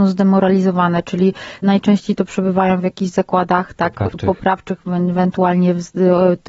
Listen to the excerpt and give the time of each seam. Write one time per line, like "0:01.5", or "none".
none